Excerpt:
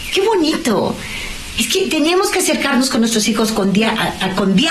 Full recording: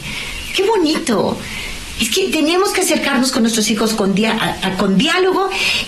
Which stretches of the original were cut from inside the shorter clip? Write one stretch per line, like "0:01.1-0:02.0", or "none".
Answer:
none